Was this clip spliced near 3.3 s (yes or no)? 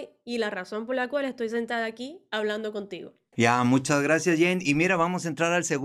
yes